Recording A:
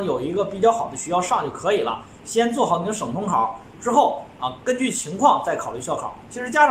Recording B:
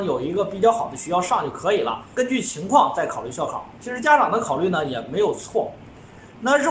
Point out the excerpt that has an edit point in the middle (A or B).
B